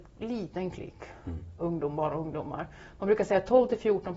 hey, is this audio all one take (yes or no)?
no